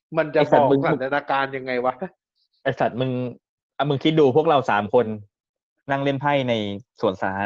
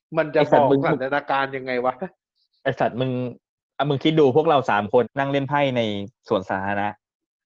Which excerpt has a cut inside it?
second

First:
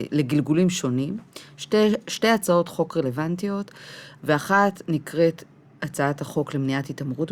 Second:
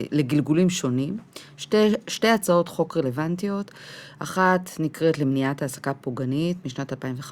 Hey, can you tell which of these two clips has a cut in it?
first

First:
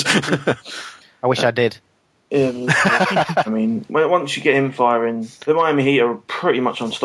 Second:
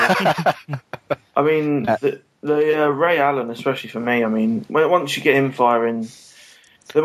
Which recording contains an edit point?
first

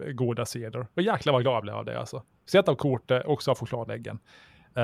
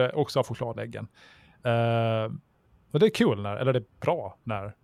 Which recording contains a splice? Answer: second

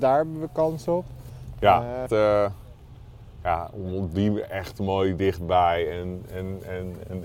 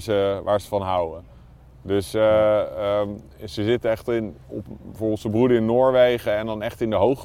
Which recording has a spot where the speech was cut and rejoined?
first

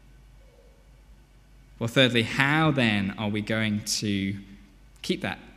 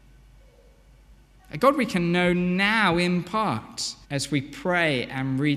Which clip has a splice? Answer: second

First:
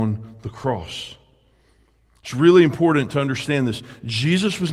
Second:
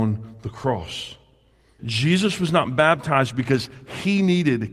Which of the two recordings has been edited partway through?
second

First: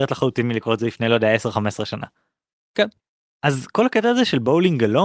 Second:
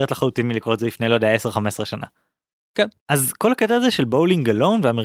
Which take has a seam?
second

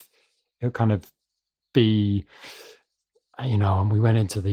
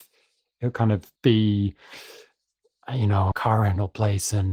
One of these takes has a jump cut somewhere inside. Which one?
second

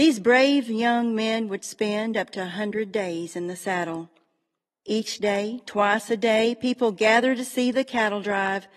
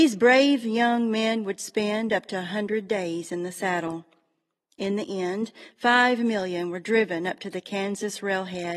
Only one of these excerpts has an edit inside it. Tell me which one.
first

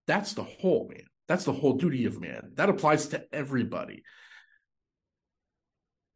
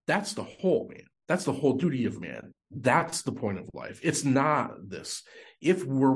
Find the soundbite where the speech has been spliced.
second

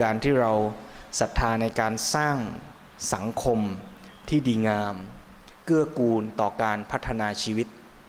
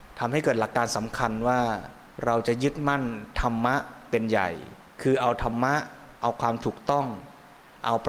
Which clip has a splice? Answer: second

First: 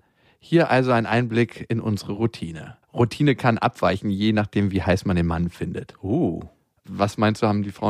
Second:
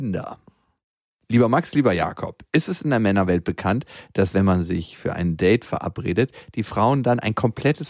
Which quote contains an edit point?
first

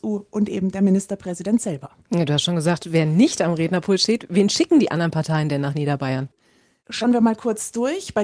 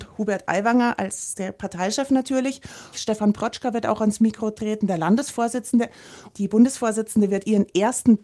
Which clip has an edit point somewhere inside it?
second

